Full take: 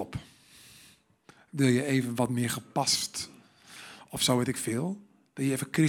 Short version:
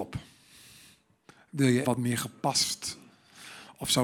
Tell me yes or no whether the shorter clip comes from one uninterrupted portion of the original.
no